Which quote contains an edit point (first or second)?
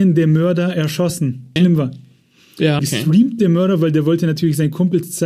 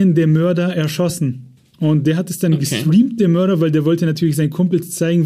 first